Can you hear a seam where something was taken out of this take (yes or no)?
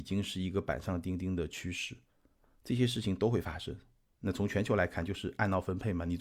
yes